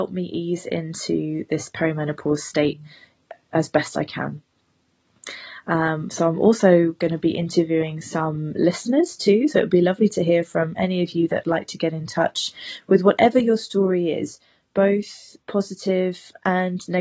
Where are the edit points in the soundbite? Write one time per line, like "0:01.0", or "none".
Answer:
none